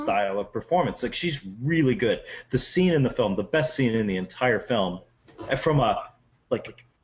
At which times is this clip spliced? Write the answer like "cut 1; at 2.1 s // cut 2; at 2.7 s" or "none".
none